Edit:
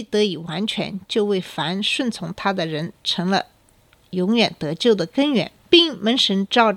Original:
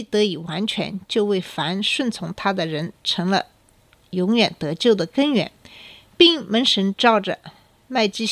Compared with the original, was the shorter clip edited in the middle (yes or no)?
yes